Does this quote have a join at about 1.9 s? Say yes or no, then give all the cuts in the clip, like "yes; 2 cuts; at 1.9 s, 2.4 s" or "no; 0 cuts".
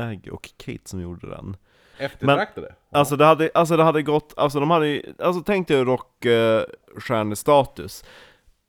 yes; 1 cut; at 1.9 s